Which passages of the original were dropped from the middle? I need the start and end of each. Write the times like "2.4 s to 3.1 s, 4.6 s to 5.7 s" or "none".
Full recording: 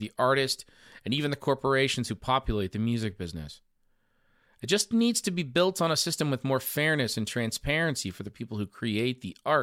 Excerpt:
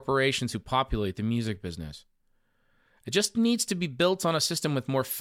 none